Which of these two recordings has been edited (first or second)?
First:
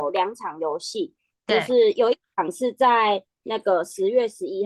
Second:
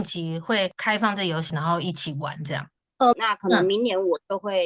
second